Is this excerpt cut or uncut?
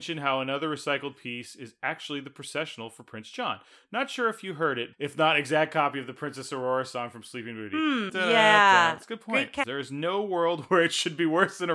cut